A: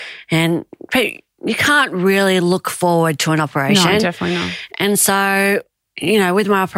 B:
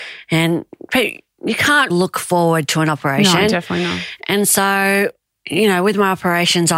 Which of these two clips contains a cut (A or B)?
B